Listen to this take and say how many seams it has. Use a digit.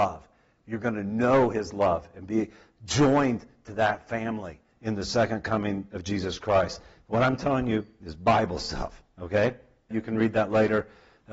1